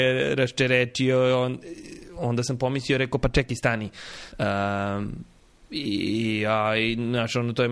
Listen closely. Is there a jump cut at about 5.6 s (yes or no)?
no